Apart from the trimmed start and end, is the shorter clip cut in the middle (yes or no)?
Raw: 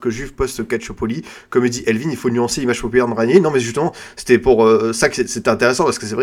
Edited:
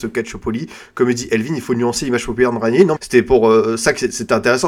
yes